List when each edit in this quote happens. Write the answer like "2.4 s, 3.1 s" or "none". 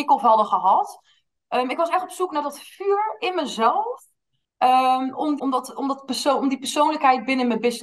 5.4 s